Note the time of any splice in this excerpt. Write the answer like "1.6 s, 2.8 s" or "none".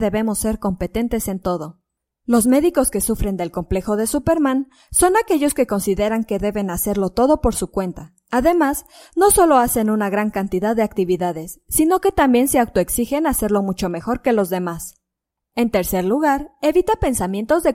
none